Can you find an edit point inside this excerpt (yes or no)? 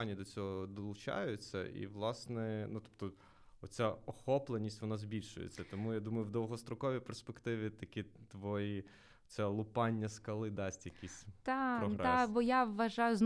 no